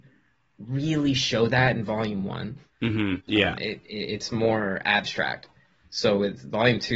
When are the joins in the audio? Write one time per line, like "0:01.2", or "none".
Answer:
0:03.2